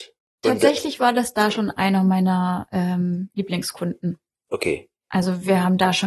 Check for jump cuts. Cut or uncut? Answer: uncut